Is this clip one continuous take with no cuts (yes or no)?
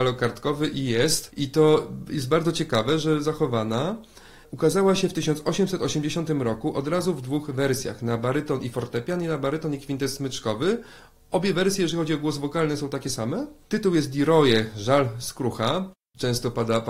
yes